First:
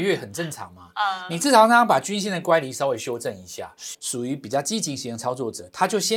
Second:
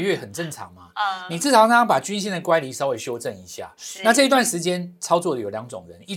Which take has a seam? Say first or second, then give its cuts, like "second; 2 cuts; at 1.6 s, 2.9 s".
first; 1 cut; at 3.9 s